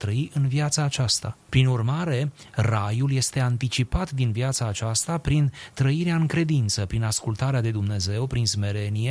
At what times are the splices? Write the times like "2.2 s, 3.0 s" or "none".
1.4 s